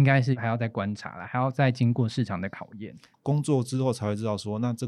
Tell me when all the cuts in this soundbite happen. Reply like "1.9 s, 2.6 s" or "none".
3.1 s